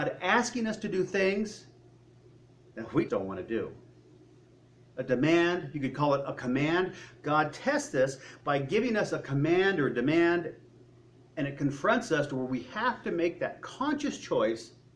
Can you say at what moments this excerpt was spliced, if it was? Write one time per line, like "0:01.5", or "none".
0:03.1